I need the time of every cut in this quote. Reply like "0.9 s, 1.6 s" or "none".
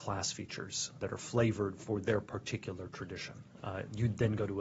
1.0 s, 3.6 s